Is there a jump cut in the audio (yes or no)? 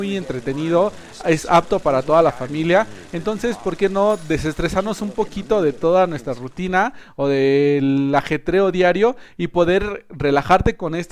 no